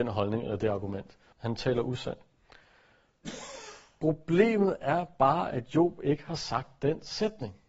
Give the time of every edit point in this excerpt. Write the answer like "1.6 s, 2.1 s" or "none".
1.3 s